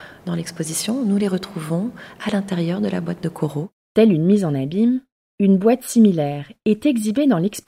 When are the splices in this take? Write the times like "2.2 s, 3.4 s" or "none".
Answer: 3.7 s